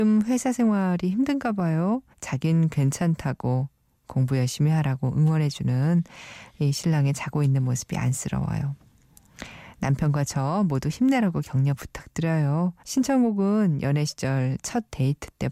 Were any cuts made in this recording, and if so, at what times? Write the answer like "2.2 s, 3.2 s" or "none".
2.1 s, 12.8 s

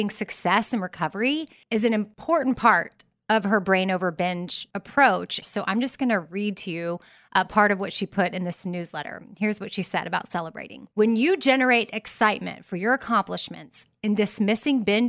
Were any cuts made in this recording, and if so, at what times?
5.4 s, 10.9 s

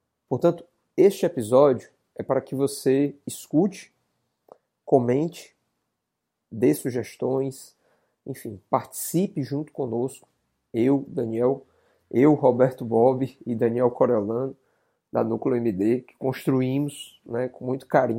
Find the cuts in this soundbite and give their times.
none

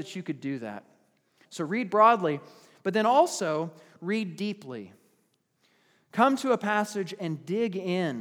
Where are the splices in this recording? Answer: 1.4 s

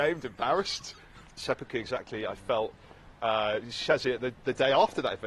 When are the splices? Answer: 1.3 s

